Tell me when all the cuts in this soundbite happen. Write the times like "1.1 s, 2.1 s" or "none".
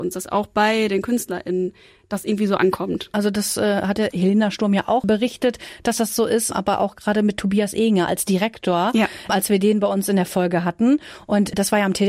none